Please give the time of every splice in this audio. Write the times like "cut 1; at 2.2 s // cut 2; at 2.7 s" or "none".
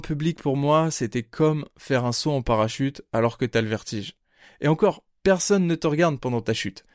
none